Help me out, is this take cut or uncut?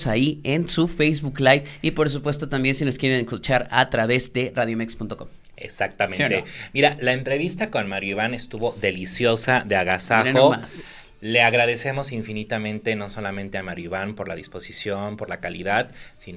uncut